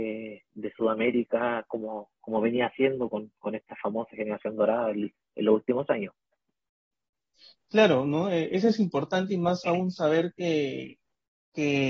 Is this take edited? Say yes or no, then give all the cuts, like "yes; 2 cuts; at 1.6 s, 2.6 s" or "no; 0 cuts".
no; 0 cuts